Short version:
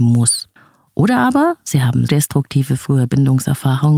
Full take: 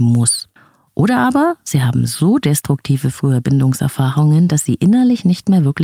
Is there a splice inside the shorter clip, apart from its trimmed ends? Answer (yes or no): yes